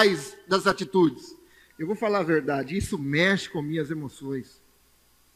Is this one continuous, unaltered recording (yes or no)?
yes